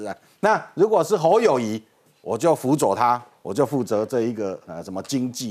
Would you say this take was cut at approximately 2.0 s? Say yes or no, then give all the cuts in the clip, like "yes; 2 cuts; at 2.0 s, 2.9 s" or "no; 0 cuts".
no; 0 cuts